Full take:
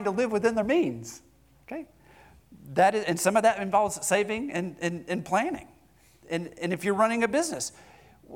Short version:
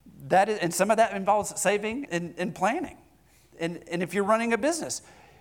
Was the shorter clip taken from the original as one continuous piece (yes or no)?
no